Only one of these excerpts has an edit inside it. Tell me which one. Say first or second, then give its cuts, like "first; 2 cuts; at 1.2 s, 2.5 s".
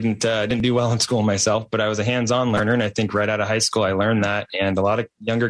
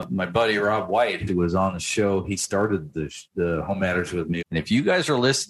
second; 2 cuts; at 1.3 s, 4.4 s